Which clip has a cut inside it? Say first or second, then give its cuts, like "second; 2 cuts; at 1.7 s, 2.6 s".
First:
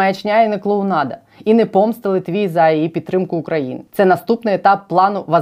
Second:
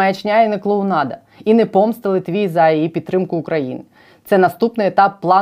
first; 1 cut; at 3.9 s